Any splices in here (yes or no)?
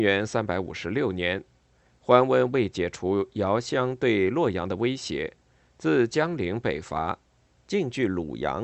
no